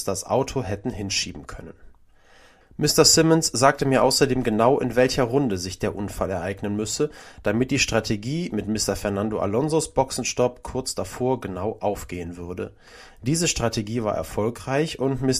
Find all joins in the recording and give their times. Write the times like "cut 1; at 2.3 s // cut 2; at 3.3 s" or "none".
cut 1; at 2.6 s